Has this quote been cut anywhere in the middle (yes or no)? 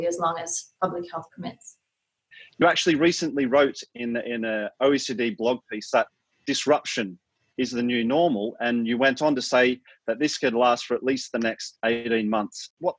no